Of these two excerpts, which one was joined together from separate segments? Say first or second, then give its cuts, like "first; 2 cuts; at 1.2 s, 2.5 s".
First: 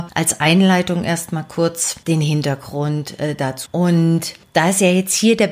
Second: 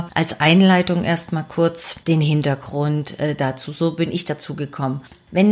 first; 1 cut; at 3.7 s